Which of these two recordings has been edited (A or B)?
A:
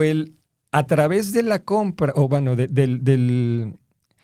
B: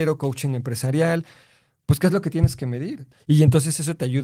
B